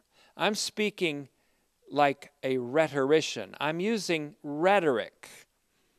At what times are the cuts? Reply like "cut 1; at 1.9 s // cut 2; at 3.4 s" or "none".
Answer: none